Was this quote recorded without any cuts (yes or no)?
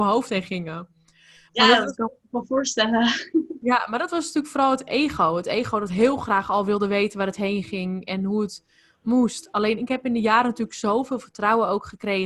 yes